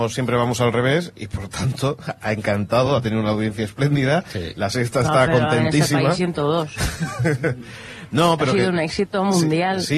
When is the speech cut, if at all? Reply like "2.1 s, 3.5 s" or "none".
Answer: none